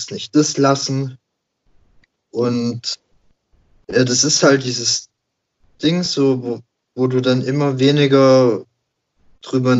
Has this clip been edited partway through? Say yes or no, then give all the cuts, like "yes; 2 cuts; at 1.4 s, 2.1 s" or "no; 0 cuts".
no; 0 cuts